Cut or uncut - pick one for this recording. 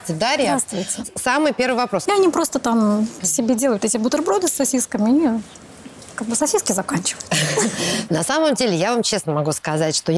cut